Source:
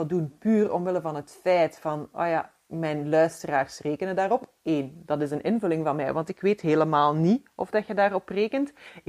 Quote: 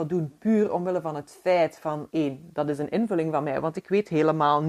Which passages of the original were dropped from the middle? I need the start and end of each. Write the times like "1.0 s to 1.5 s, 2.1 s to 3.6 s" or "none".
2.1 s to 4.6 s